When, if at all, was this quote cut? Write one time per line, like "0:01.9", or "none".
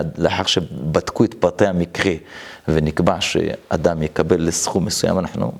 none